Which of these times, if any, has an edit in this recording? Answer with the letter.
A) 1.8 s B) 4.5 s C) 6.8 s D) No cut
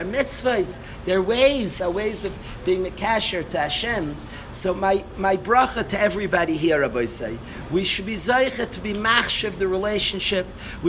A